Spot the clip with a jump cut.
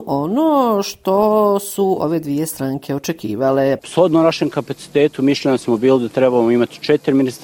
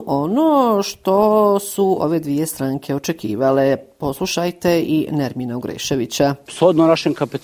first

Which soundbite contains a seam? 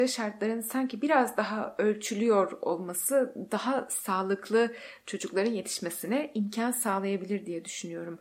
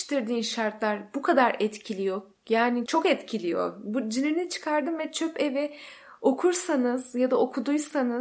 second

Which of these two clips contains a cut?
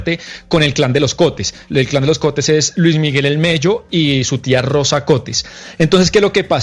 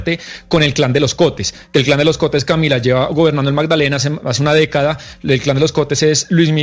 first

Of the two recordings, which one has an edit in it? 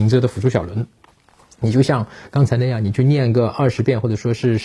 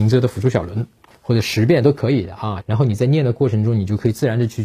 second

